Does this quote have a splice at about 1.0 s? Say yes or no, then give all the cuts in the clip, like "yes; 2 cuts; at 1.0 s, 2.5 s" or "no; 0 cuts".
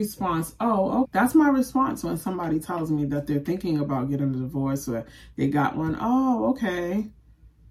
yes; 1 cut; at 1.0 s